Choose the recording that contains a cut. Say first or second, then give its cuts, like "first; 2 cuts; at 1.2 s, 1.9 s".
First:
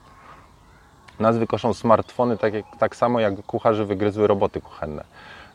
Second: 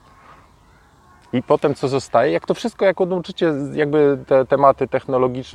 first; 1 cut; at 1.1 s